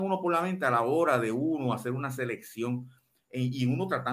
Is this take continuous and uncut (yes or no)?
yes